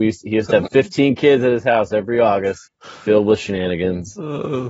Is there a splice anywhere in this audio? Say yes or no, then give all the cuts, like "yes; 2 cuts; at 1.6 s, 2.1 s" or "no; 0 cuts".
yes; 1 cut; at 2.7 s